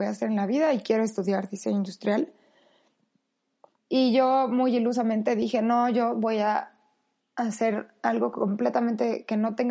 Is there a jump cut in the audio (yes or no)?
yes